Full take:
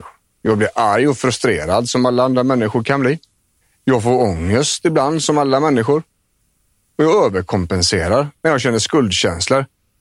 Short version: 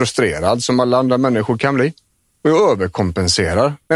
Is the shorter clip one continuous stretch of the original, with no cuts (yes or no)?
no